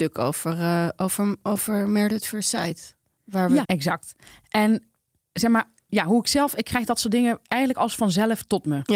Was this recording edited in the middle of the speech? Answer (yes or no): yes